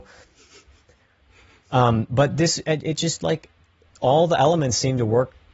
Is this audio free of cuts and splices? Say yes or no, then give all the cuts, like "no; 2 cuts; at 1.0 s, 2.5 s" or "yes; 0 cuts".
yes; 0 cuts